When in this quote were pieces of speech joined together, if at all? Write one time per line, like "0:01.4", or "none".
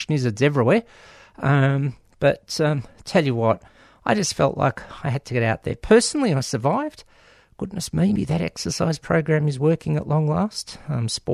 0:08.2